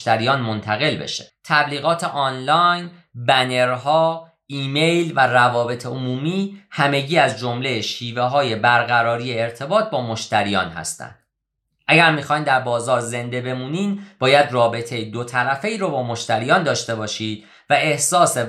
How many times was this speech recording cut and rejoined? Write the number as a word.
one